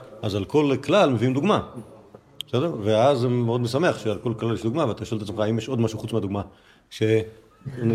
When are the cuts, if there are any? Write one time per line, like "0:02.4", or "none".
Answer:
none